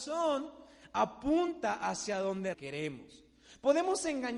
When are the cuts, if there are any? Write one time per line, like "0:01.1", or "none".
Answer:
0:02.5

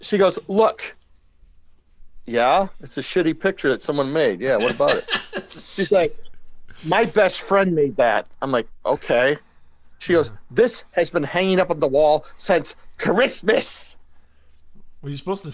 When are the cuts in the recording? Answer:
none

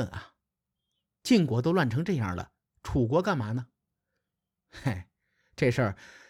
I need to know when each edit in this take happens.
none

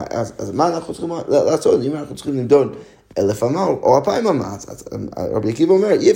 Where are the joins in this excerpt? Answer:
0:04.8

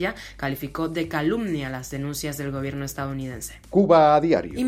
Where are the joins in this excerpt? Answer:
none

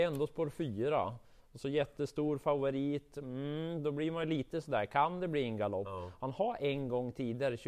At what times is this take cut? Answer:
none

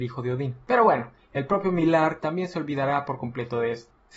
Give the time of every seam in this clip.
0:02.2

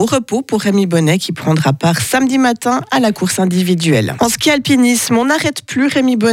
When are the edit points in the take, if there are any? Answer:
0:04.2

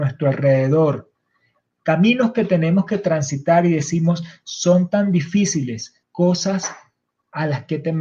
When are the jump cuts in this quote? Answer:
0:06.0

